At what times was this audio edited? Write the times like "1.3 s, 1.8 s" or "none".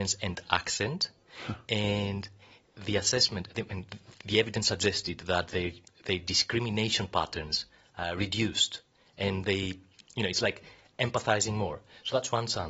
none

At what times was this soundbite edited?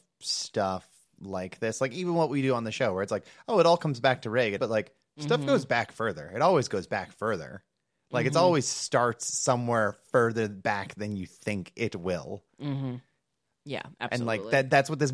4.6 s

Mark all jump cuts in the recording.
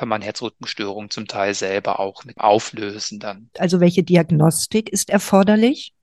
3.5 s

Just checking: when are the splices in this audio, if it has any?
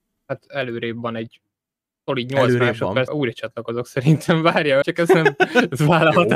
3.1 s, 4.8 s

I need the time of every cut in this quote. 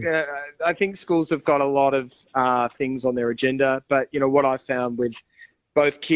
none

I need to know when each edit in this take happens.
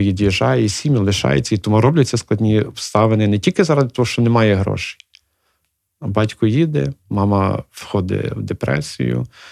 none

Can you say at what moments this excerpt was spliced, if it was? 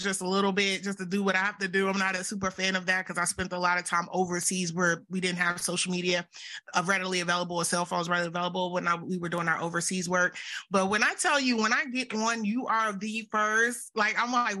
none

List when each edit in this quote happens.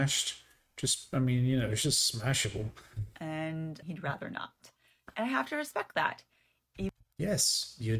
3.8 s

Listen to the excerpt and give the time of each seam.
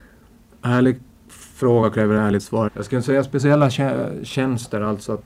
2.7 s

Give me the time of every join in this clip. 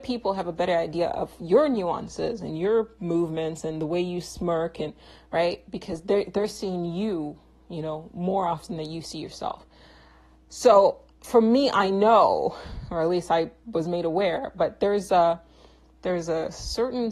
none

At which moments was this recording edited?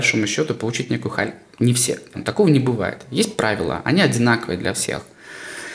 2.1 s

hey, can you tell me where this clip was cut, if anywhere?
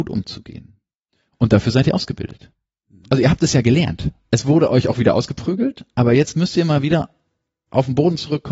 none

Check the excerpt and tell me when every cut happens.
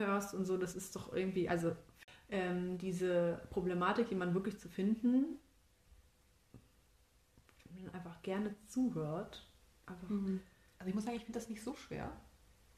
none

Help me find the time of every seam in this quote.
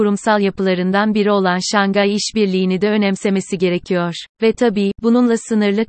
4.3 s

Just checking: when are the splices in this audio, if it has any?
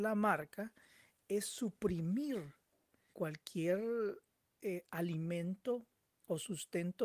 3.1 s

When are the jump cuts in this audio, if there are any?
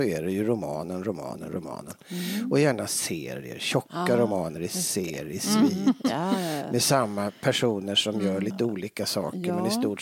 none

